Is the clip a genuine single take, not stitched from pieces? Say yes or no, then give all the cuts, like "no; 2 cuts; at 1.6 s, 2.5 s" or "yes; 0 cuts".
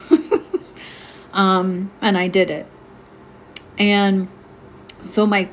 no; 1 cut; at 3.6 s